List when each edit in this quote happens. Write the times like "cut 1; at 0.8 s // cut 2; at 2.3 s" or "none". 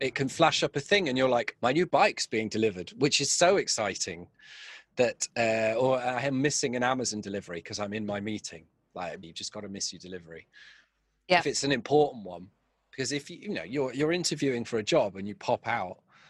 cut 1; at 1.6 s // cut 2; at 9.2 s